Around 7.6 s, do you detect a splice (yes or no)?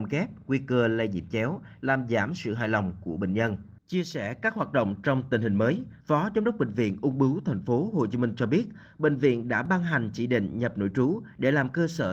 no